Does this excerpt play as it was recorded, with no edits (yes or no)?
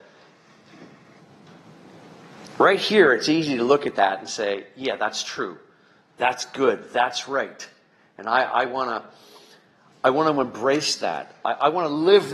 yes